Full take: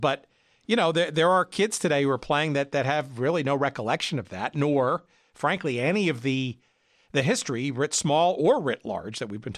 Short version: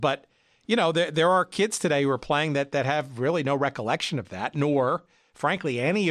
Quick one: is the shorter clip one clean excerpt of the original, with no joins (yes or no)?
yes